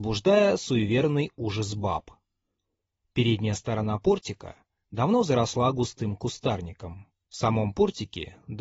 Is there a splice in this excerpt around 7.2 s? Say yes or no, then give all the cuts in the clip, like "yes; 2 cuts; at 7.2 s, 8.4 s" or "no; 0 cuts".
yes; 1 cut; at 7.2 s